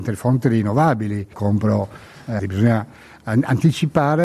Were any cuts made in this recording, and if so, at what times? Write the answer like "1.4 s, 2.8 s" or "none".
1.3 s, 2.4 s

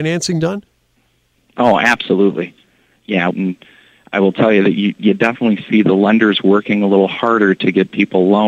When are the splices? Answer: 3.3 s

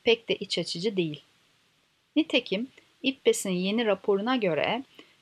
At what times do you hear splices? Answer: none

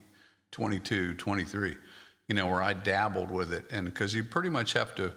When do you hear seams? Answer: none

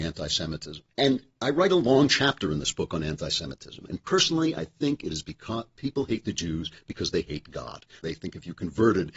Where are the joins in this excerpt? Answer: 0.9 s, 3.9 s, 8.0 s

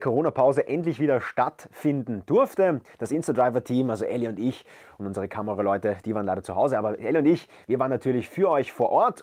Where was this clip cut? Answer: none

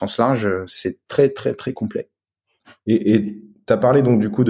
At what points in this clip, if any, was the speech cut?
none

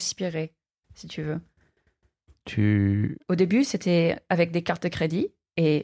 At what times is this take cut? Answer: 3.2 s

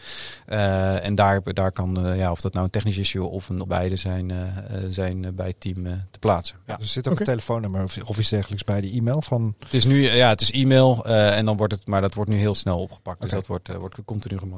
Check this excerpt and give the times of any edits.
3.6 s, 12.5 s

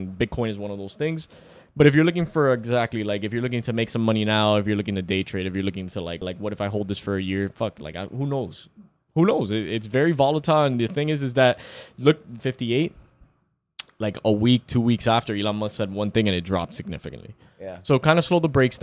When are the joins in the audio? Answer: 6.2 s, 12.4 s

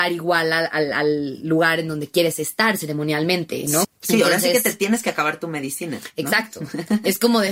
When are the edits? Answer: 3.8 s

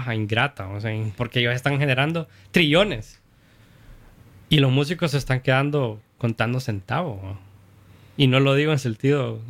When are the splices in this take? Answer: 1.2 s

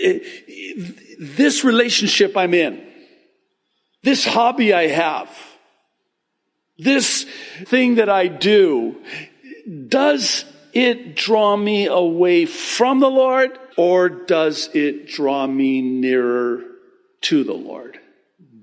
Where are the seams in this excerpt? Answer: 7.7 s, 13.7 s

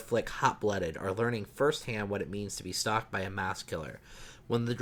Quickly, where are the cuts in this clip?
none

